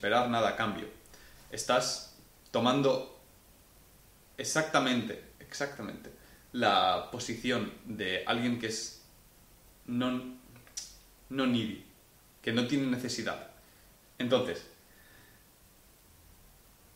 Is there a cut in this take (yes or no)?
yes